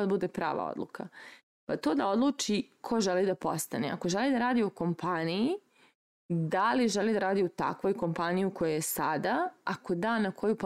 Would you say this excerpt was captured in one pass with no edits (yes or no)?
yes